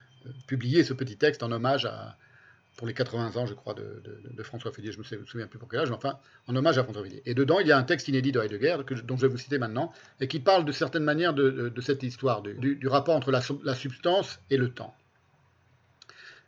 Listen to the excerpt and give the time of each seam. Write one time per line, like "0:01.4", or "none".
0:04.2
0:12.6